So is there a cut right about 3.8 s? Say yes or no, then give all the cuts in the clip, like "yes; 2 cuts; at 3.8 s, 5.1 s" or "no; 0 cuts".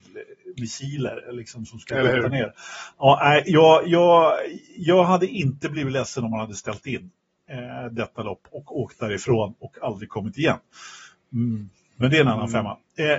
no; 0 cuts